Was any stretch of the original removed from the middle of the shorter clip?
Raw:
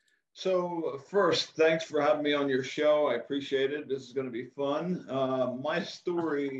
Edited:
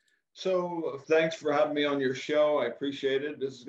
yes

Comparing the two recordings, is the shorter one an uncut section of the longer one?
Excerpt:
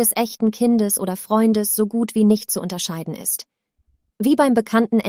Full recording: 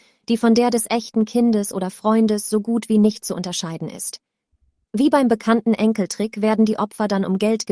yes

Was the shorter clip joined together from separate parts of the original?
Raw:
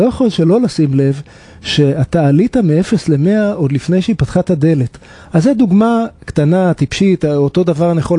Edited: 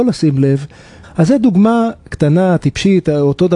yes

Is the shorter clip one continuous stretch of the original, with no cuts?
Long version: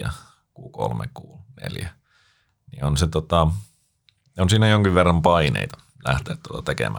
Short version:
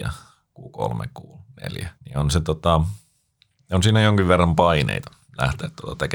no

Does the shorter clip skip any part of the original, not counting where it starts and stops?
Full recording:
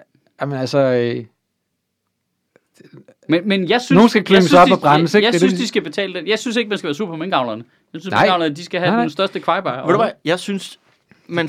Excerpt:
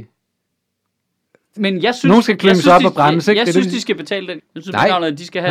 yes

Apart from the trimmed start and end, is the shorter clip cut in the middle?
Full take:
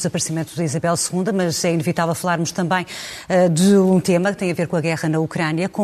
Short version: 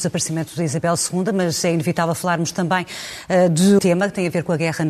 yes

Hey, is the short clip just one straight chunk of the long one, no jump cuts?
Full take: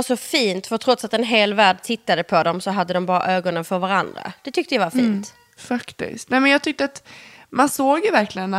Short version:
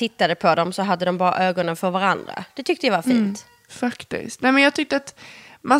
yes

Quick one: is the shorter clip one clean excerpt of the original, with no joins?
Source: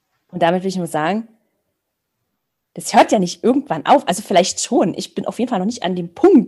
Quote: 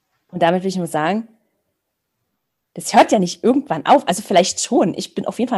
yes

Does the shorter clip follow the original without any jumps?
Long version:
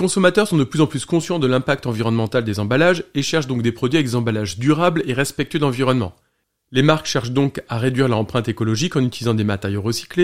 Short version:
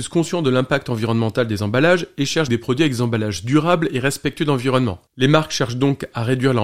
no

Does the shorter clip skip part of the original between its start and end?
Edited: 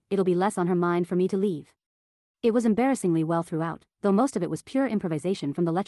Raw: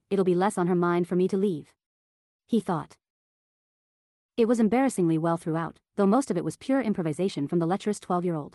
yes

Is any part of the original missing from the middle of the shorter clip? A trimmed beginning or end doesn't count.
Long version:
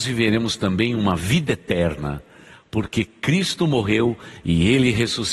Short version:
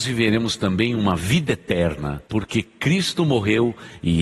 yes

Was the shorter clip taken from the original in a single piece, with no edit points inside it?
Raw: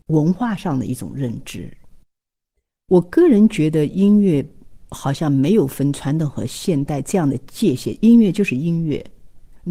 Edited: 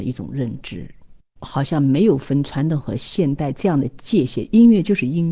no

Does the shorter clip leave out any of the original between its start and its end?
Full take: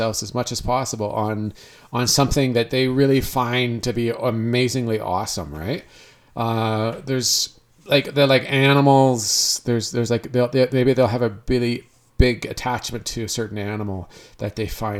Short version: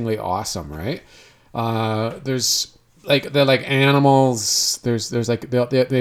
no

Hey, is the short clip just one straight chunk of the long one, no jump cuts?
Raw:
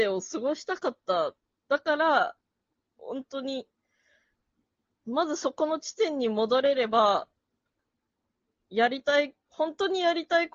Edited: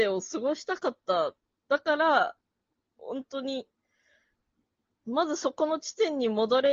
yes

